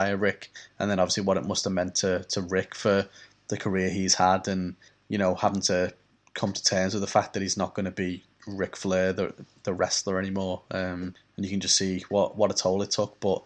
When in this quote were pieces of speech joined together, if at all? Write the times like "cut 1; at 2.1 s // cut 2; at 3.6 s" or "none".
none